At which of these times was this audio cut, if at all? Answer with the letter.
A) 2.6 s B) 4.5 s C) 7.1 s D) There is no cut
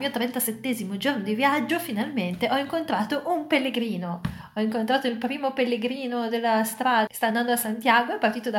C